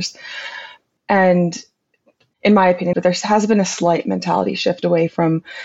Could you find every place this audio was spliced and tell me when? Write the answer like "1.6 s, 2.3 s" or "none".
1.0 s, 2.9 s